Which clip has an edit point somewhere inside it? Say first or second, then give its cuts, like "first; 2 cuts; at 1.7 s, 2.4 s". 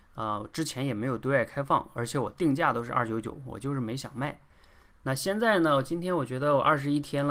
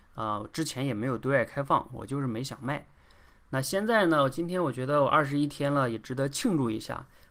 second; 1 cut; at 1.9 s